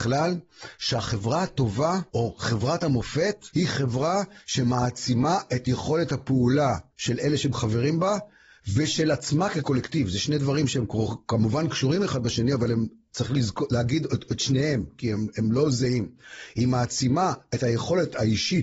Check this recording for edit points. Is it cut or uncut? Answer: uncut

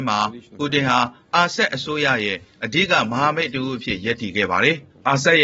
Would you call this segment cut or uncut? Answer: uncut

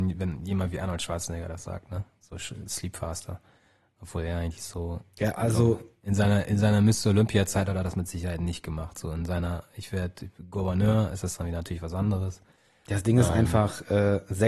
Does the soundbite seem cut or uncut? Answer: uncut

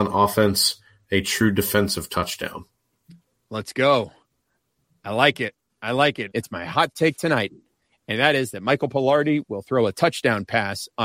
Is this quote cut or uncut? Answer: cut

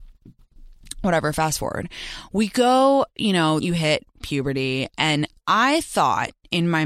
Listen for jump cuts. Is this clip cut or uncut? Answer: cut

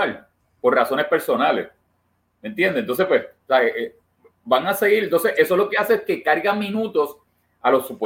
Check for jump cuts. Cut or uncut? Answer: uncut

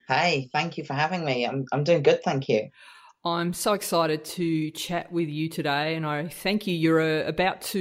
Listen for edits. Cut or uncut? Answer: uncut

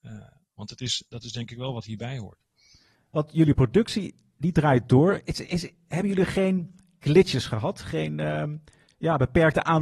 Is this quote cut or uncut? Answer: uncut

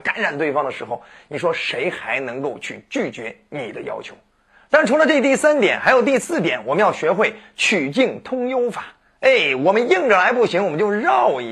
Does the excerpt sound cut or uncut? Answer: uncut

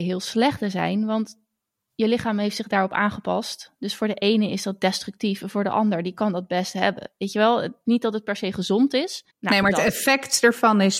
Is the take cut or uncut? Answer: cut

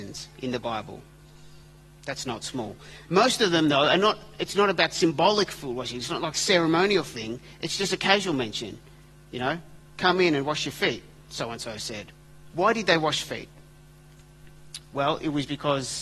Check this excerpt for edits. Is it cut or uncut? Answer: cut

